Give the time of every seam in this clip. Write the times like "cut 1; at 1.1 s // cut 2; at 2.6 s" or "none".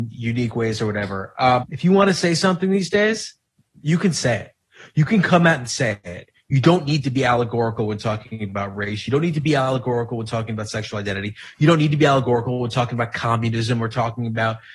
cut 1; at 1.6 s